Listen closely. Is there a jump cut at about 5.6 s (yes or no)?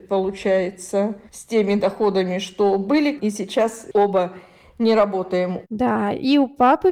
yes